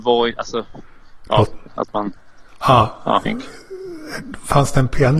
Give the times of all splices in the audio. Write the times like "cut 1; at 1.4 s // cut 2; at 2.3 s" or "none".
cut 1; at 1.7 s // cut 2; at 3.3 s